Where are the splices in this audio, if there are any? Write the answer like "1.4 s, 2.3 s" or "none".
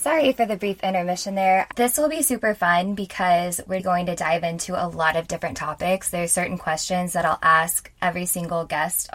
1.7 s